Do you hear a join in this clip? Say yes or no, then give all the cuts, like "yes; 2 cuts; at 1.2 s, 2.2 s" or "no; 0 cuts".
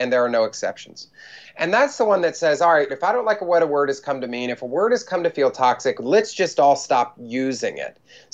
yes; 2 cuts; at 1.4 s, 2.9 s